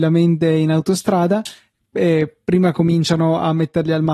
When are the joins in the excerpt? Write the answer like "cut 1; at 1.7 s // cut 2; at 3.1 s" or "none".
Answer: none